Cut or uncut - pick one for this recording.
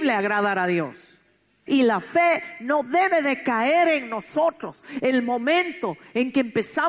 cut